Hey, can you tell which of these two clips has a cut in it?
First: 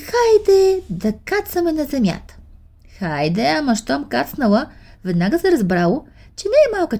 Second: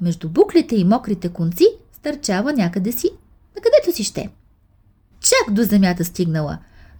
second; 1 cut; at 5.1 s

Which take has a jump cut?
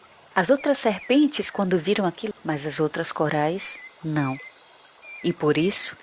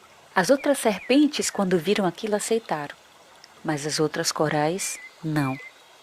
first; 1 cut; at 2.3 s

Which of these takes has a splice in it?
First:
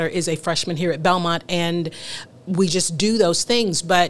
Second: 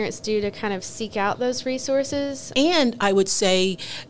second; 1 cut; at 2.5 s

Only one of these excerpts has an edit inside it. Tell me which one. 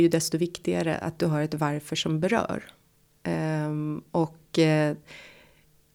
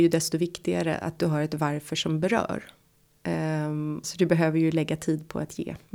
second; 1 cut; at 4.0 s

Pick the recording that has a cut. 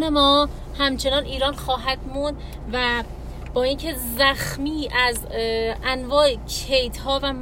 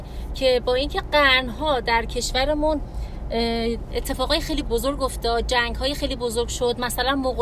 second; 1 cut; at 4.6 s

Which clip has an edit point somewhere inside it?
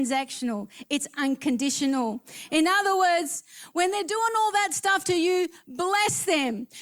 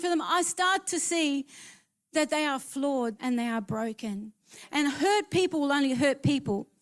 second; 1 cut; at 3.2 s

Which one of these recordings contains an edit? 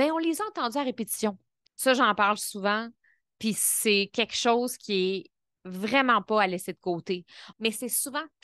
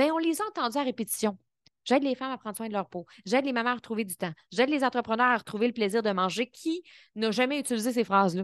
first; 2 cuts; at 1.7 s, 7.5 s

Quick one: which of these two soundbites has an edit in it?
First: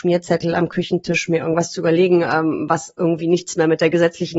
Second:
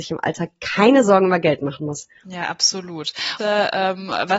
second; 1 cut; at 3.4 s

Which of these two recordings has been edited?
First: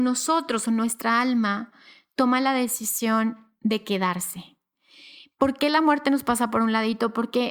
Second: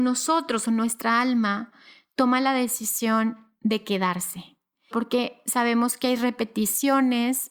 second; 1 cut; at 4.9 s

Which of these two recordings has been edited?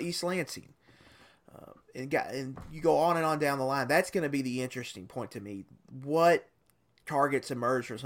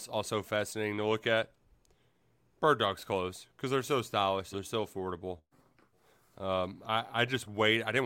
second; 1 cut; at 4.5 s

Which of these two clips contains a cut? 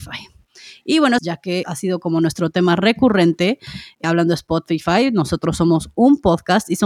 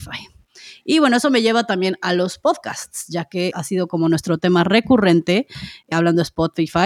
first; 1 cut; at 1.2 s

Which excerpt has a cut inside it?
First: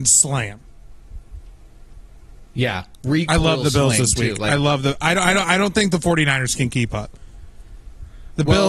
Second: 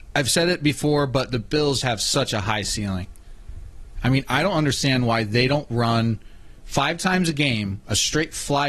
second; 2 cuts; at 1.8 s, 4.0 s

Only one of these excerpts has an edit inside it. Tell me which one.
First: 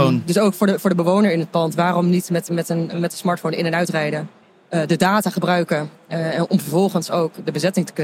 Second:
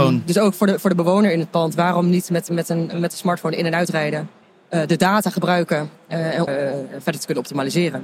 second; 1 cut; at 6.5 s

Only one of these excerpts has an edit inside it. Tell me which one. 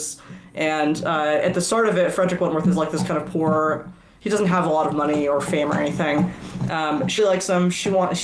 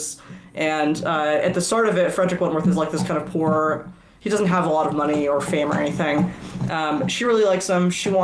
first; 1 cut; at 7.2 s

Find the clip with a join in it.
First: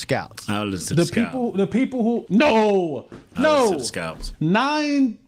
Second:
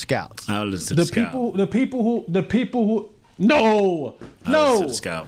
first; 2 cuts; at 2.3 s, 4.3 s

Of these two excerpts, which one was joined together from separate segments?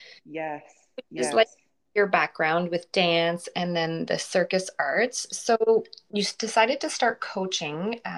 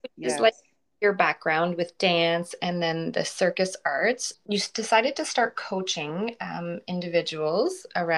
second; 1 cut; at 4.3 s

